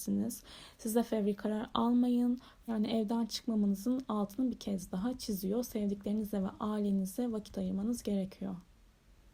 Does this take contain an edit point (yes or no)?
yes